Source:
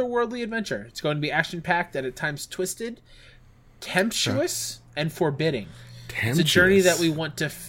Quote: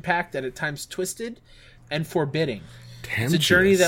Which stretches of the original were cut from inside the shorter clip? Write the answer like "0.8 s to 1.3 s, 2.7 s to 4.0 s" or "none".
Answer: 3.4 s to 4.8 s